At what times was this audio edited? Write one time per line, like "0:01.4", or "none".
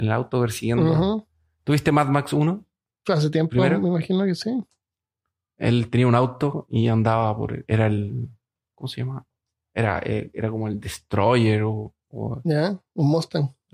none